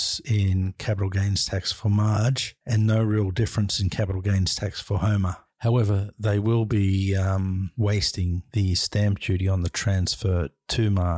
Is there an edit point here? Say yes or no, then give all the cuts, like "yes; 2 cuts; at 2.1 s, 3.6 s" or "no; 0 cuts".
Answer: no; 0 cuts